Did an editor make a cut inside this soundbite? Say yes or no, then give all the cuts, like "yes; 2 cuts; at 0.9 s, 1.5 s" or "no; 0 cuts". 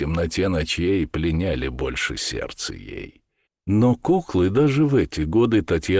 yes; 1 cut; at 3.5 s